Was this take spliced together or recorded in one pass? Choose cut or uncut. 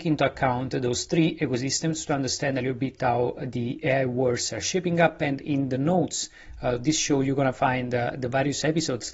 uncut